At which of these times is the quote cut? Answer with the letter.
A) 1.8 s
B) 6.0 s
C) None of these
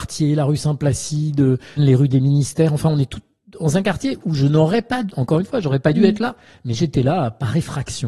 A